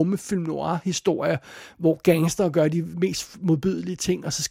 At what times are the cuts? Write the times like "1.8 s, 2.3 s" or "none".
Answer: none